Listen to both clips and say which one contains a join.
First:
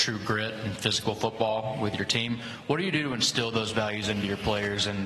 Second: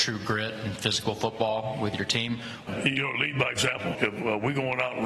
second; 2 cuts; at 2.7 s, 3.9 s

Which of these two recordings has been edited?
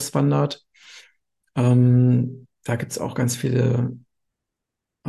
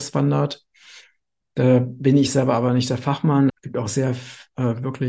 second; 2 cuts; at 1.4 s, 3.5 s

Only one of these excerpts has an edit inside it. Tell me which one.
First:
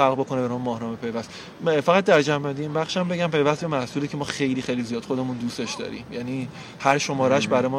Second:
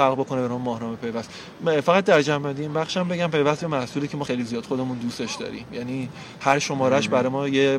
second; 1 cut; at 4.2 s

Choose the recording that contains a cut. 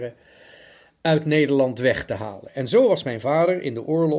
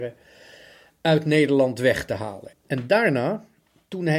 second; 1 cut; at 2.5 s

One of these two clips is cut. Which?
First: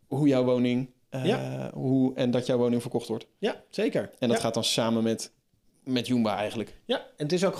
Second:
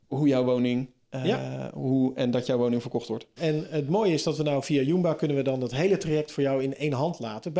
second; 1 cut; at 3.4 s

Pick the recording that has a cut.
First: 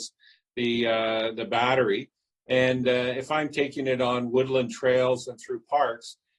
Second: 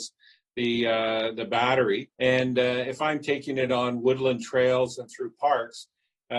second; 1 cut; at 2.1 s

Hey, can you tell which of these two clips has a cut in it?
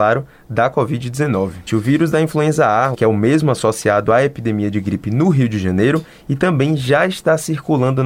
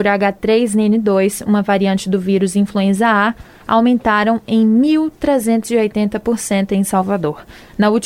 first; 2 cuts; at 1.7 s, 2.9 s

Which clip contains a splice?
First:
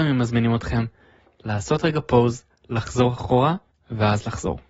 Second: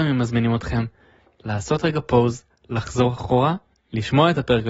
first; 1 cut; at 3.7 s

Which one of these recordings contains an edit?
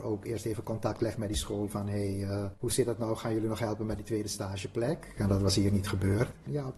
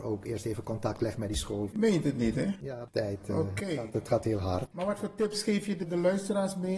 second; 1 cut; at 1.7 s

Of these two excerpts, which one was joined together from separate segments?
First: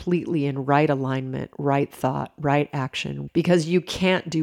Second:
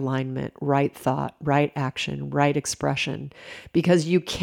first; 1 cut; at 3.3 s

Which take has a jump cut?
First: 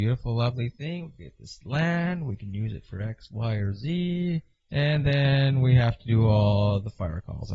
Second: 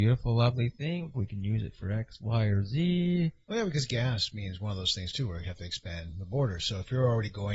second; 2 cuts; at 1.1 s, 3.5 s

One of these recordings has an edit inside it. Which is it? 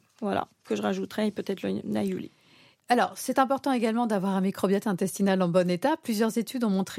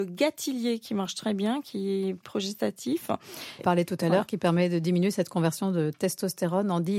second; 1 cut; at 3.6 s

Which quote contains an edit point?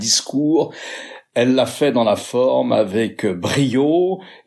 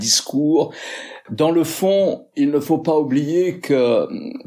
second; 1 cut; at 1.3 s

